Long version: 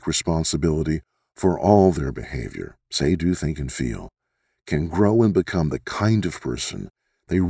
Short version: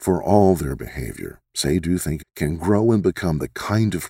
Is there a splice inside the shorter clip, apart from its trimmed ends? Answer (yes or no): yes